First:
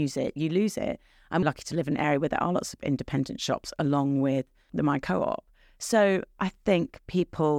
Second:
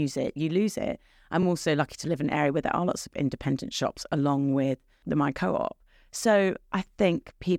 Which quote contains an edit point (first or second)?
first